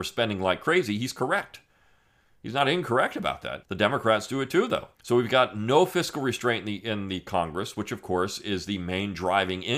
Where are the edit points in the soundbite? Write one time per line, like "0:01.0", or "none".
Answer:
0:03.6
0:04.9